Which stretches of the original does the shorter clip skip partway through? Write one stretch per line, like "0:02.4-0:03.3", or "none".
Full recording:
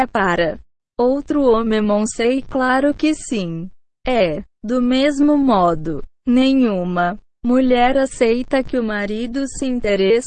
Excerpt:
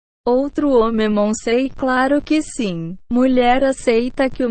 0:03.8-0:07.4